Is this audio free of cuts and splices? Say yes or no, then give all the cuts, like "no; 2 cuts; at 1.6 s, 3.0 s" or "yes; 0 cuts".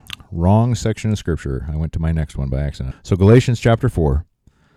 no; 1 cut; at 2.9 s